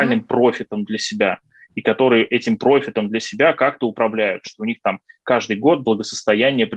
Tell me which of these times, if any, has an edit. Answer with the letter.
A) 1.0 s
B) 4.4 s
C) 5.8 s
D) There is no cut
B